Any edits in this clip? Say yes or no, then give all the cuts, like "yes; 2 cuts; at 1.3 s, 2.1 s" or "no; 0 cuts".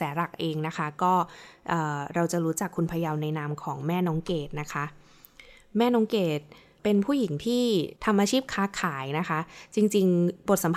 yes; 2 cuts; at 6.8 s, 8.0 s